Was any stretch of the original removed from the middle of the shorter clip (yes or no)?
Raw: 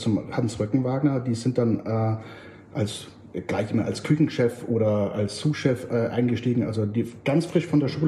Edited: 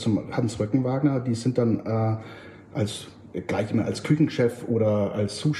no